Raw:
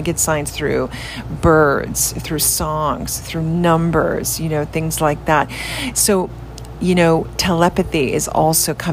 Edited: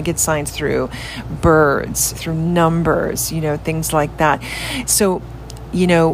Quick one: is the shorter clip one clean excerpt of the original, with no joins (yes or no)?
no